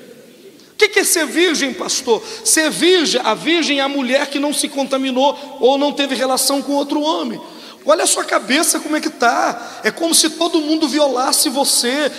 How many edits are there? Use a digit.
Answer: 2